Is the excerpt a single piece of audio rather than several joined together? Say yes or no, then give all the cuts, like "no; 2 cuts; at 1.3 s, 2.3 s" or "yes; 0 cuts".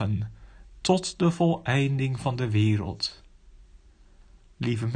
yes; 0 cuts